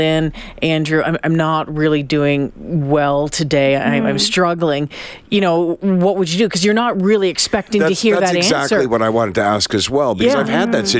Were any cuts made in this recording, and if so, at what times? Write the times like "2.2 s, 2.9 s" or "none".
none